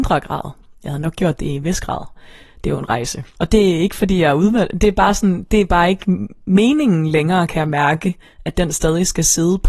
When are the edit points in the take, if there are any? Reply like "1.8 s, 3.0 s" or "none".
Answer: 3.4 s